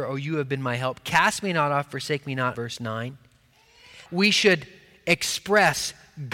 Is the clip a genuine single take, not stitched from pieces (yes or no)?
no